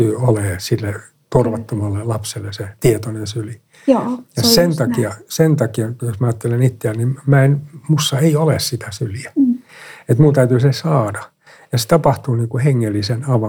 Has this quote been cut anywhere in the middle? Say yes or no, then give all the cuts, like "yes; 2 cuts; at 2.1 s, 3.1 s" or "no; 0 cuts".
no; 0 cuts